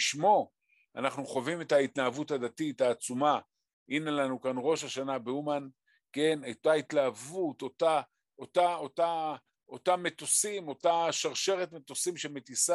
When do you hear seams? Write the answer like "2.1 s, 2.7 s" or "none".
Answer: none